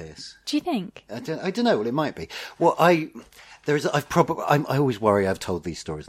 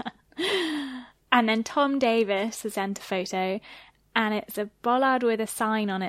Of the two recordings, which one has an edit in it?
second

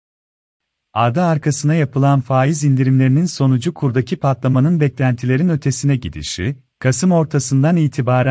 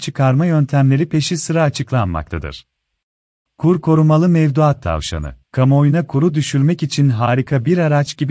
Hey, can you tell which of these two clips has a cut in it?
second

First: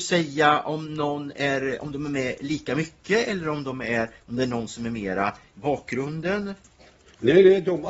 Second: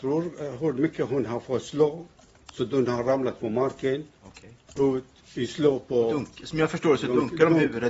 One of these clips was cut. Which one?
second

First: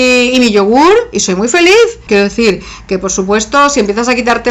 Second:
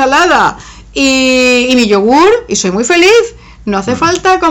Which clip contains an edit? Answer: first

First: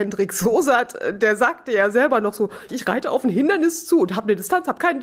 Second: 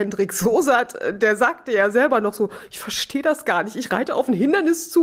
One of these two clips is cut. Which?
first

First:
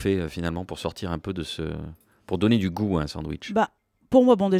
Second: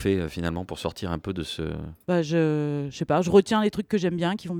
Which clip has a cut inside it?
second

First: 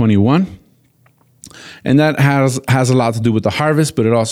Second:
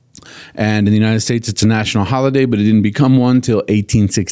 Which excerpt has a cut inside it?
first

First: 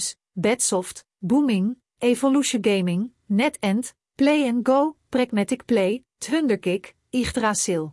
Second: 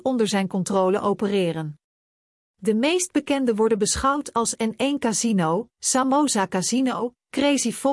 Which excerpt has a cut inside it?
first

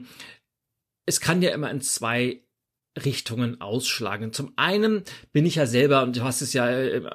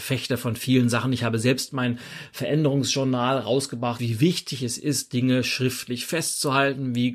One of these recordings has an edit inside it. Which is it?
second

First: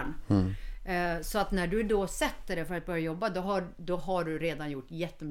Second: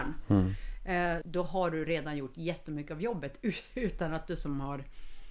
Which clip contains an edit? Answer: second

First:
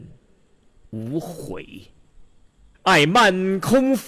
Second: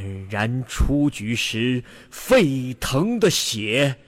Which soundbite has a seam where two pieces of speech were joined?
first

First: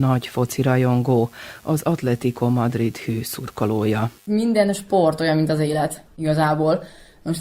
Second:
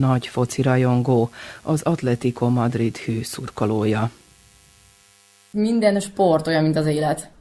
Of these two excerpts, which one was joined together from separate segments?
first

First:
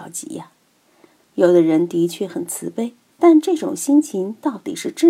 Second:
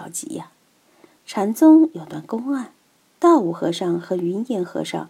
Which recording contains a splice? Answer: first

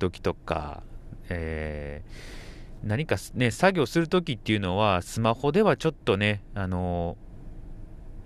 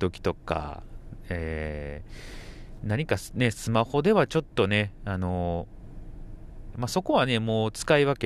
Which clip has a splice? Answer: second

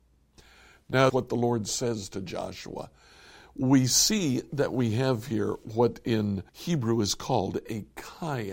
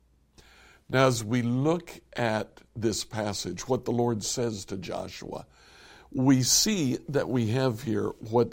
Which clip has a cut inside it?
first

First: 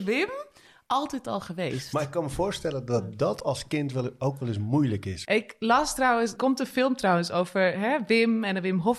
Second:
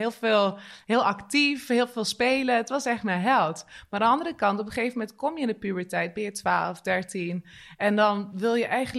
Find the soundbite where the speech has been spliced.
first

